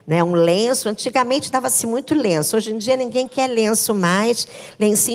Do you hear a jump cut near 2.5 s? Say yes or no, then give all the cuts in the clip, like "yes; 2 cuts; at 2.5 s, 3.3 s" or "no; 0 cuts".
no; 0 cuts